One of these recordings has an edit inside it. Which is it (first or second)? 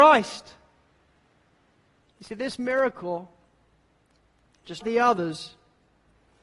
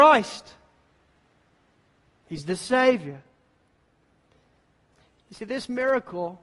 first